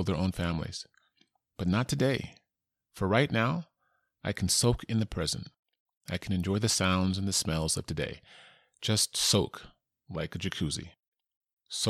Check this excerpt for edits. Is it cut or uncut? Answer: uncut